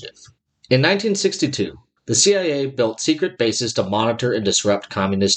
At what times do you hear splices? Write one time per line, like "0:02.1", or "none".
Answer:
0:02.0